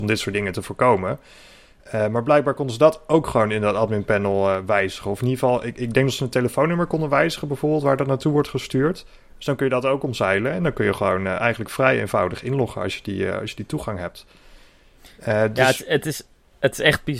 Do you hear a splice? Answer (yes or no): no